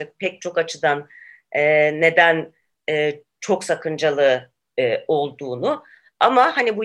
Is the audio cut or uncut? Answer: uncut